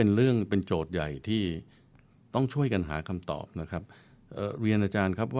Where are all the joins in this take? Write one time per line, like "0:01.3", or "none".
none